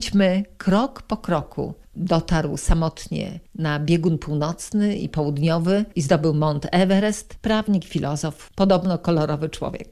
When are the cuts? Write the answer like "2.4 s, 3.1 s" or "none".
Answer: 1.8 s